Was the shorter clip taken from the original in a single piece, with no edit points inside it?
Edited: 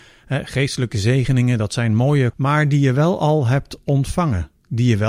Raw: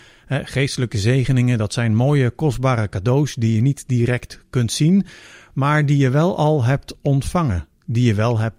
no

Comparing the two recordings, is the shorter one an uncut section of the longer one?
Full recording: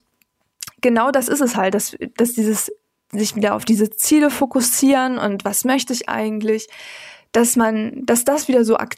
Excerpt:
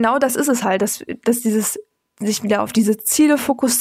yes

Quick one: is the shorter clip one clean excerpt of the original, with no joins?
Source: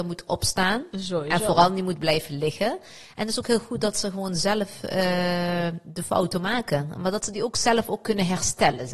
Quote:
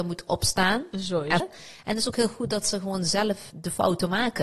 no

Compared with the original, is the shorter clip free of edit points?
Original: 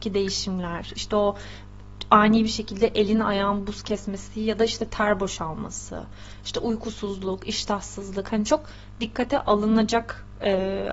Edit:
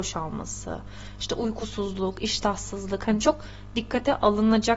yes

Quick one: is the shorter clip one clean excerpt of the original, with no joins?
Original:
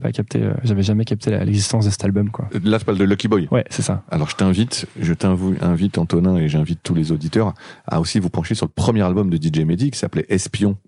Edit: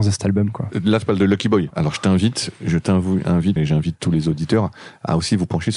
no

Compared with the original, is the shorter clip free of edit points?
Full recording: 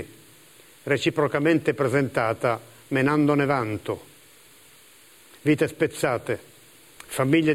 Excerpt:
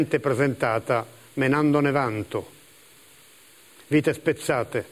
yes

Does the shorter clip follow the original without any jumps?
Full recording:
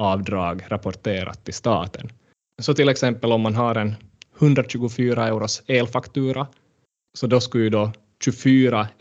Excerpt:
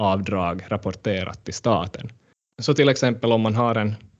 yes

